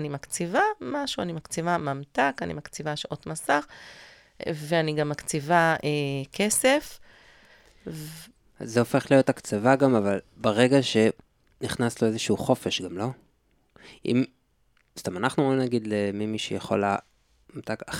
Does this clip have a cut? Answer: no; 0 cuts

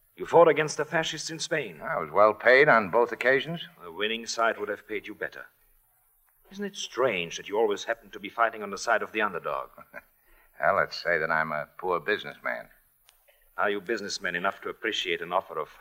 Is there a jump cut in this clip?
no; 0 cuts

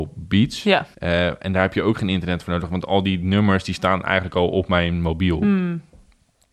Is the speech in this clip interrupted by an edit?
yes; 1 cut; at 0.9 s

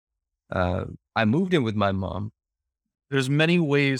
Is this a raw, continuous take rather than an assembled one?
no; 2 cuts; at 1.0 s, 2.9 s

